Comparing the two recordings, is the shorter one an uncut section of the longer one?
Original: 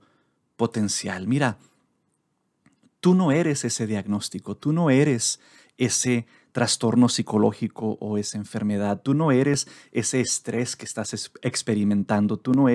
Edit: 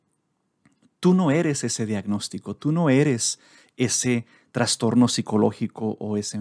yes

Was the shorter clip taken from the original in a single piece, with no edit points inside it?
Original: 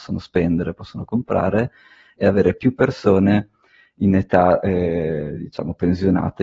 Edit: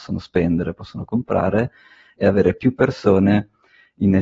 yes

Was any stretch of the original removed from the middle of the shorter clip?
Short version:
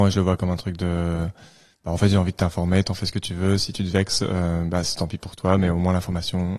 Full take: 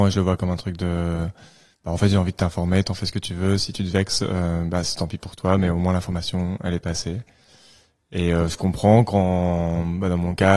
no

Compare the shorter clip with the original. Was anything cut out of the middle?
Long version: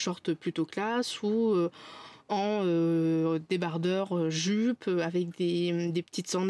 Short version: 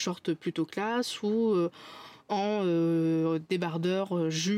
no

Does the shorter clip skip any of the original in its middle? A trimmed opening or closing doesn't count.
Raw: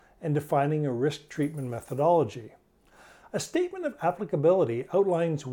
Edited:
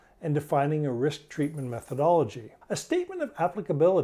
yes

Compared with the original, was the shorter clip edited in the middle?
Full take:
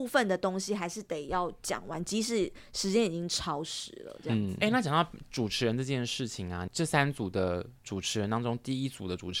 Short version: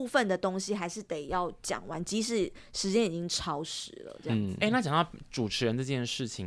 no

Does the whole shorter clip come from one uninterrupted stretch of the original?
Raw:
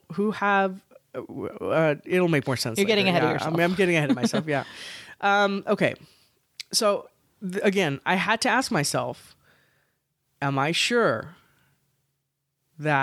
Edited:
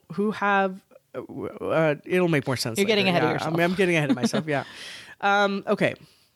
yes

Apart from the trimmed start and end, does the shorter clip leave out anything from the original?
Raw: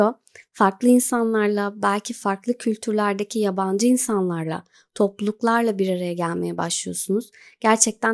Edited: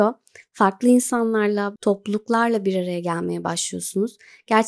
yes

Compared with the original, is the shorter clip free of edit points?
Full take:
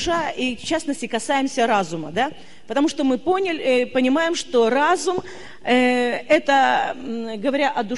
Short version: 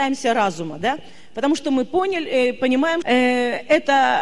no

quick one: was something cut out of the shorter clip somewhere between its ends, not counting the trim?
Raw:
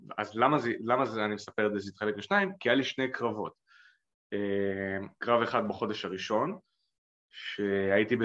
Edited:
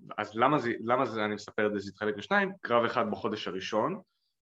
yes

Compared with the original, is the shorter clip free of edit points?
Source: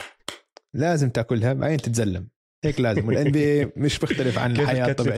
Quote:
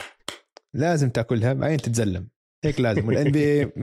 yes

